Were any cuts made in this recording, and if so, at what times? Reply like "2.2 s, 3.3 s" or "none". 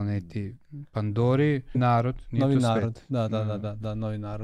1.7 s